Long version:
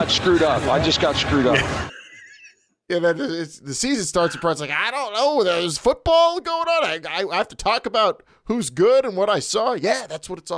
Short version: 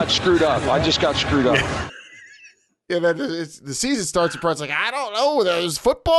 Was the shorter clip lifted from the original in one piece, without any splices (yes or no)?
yes